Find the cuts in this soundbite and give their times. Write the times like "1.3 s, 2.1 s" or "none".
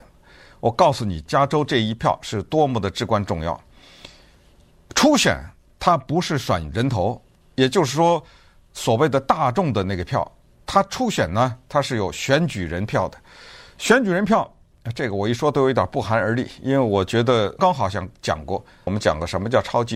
17.6 s, 18.9 s